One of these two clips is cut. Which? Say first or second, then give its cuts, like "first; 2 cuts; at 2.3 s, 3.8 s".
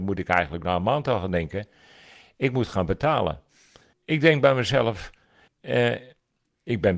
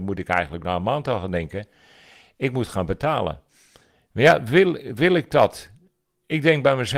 first; 2 cuts; at 3.9 s, 5.5 s